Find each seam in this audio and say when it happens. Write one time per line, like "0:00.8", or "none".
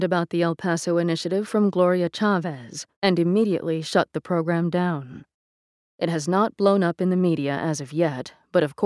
0:03.0